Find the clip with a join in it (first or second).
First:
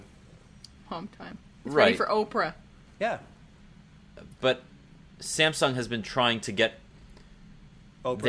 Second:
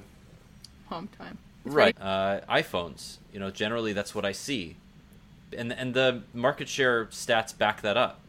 second